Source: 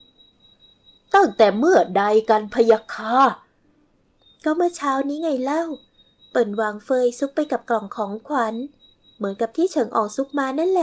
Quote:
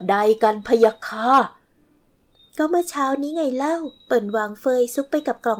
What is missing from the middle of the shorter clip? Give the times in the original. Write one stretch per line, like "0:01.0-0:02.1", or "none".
0:05.9-0:06.2